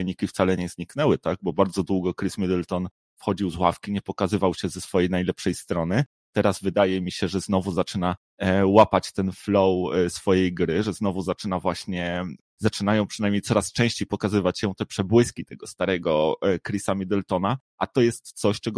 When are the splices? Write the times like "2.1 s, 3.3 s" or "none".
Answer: none